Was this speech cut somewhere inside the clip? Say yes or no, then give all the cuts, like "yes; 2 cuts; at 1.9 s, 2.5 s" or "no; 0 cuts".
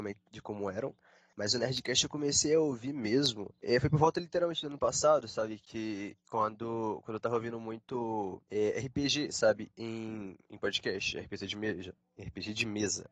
no; 0 cuts